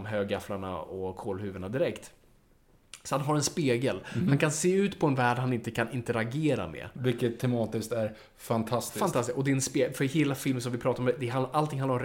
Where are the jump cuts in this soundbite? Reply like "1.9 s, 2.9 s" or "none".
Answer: none